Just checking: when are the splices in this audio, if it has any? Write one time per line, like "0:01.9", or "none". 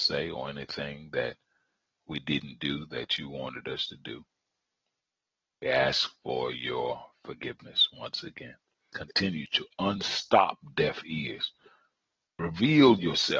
0:08.9